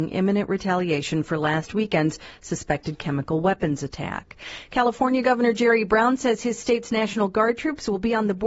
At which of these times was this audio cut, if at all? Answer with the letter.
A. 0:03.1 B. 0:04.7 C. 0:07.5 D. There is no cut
D